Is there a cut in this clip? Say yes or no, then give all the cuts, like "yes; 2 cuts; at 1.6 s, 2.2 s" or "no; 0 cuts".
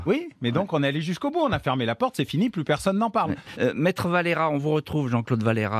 yes; 1 cut; at 3.5 s